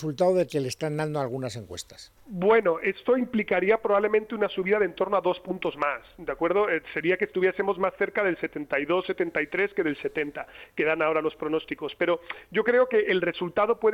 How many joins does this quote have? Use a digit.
0